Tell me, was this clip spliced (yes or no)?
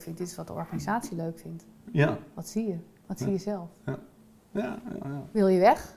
no